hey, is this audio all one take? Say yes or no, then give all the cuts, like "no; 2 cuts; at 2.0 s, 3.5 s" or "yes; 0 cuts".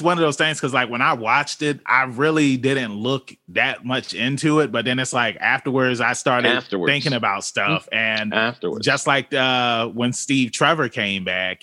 no; 1 cut; at 1.9 s